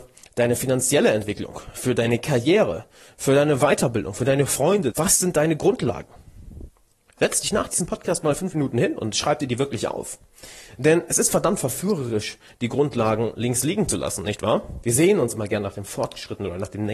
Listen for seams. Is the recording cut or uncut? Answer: cut